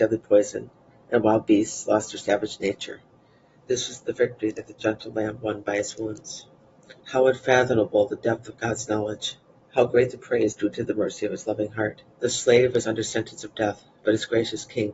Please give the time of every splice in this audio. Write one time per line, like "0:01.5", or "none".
0:07.0
0:12.1